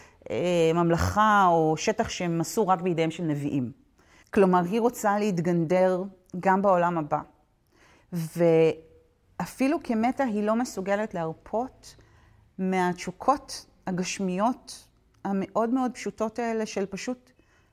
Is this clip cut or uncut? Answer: cut